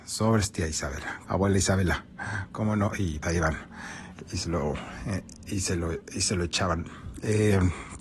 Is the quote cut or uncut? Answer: cut